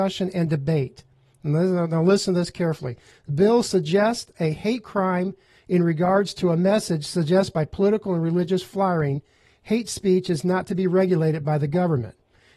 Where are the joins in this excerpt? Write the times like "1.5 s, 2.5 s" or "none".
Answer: none